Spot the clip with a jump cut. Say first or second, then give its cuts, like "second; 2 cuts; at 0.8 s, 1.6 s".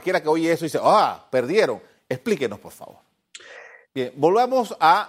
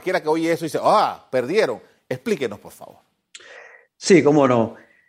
first; 1 cut; at 3.9 s